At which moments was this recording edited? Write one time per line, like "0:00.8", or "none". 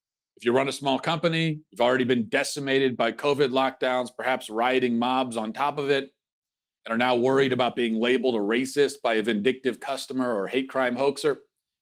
0:01.7